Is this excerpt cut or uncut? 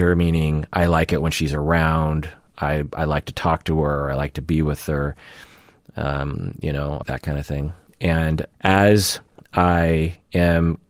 cut